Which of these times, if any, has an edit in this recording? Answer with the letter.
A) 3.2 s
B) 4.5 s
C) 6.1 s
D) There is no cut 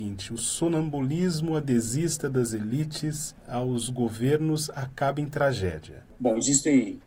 C